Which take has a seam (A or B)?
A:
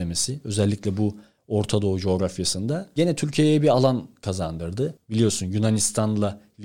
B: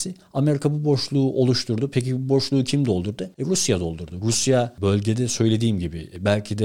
A